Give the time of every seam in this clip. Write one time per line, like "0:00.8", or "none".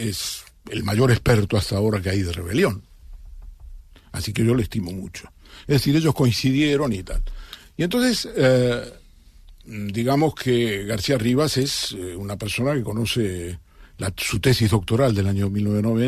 none